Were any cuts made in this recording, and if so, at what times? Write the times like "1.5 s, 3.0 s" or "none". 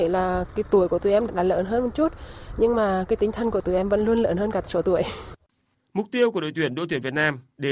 1.3 s

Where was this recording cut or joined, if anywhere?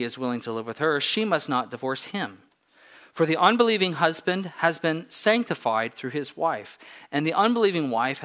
none

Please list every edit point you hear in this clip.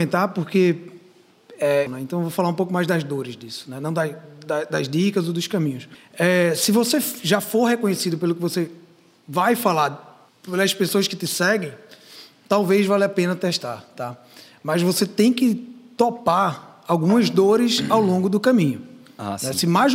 1.9 s

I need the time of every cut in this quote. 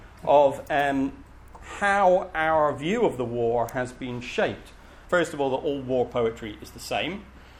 5.1 s

